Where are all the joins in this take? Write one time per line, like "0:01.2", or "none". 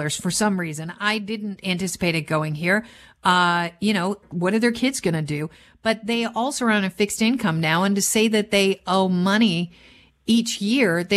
0:04.2